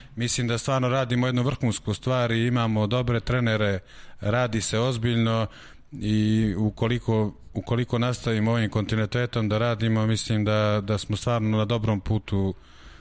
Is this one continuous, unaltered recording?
yes; 0 cuts

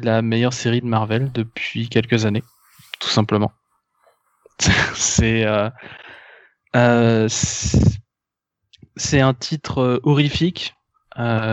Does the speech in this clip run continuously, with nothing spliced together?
yes; 0 cuts

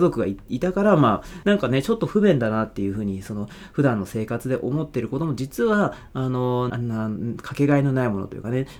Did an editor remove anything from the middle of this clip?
yes; 2 cuts; at 1.4 s, 6.7 s

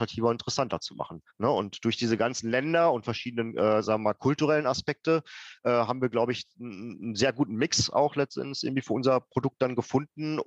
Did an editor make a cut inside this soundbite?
no; 0 cuts

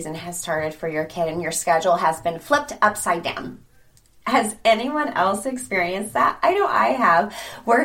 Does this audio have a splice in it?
no; 0 cuts

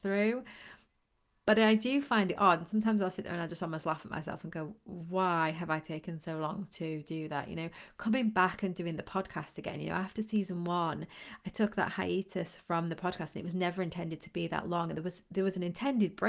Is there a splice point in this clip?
no; 0 cuts

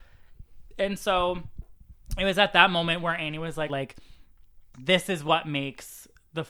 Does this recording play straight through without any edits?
no; 1 cut; at 3.7 s

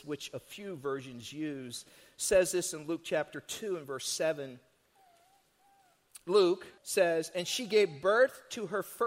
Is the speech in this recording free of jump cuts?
no; 1 cut; at 6.8 s

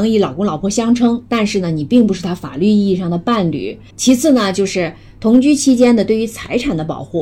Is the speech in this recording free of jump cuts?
no; 1 cut; at 3.9 s

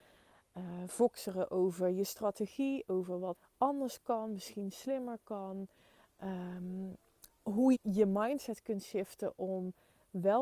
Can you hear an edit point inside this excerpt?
yes; 2 cuts; at 3.3 s, 7.7 s

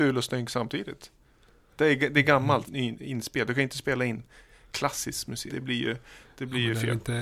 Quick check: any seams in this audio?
yes; 2 cuts; at 2.7 s, 5.5 s

